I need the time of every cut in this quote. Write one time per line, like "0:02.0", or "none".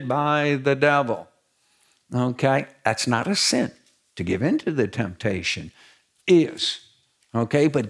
none